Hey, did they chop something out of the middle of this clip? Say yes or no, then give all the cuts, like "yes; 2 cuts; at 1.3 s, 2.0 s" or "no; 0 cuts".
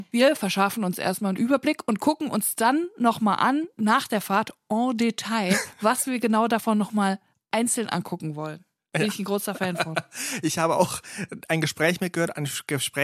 no; 0 cuts